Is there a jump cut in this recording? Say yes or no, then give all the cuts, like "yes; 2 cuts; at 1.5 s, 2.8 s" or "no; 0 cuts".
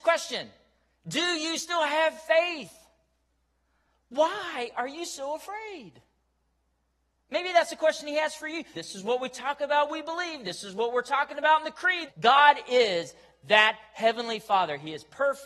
yes; 2 cuts; at 8.7 s, 12.1 s